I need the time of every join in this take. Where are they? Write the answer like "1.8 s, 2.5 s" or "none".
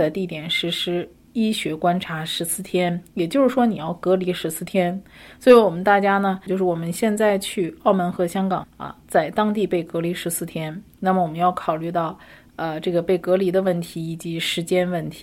6.5 s, 8.6 s